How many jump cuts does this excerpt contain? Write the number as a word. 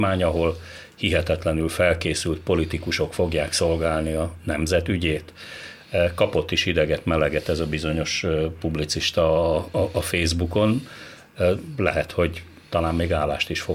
zero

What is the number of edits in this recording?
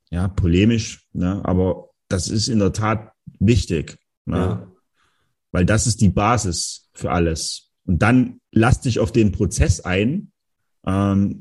zero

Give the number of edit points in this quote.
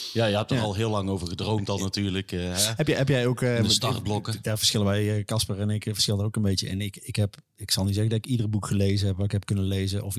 zero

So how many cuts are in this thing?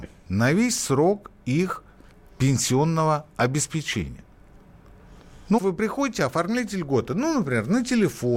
one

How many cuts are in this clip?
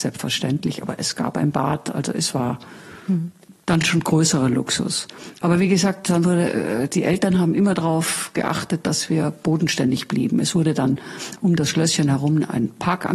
zero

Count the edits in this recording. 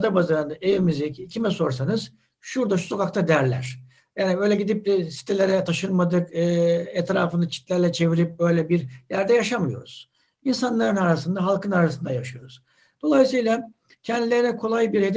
zero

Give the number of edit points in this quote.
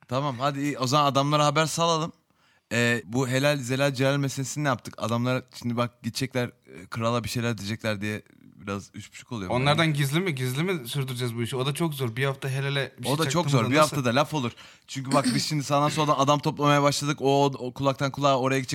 one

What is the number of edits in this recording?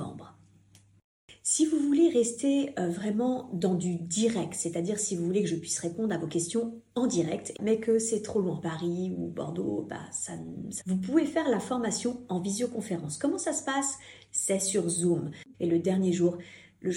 three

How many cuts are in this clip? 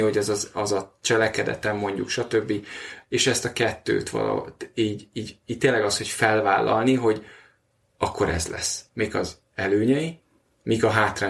two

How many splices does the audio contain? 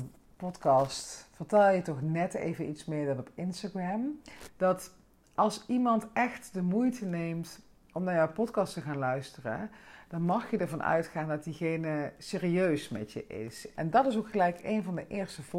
two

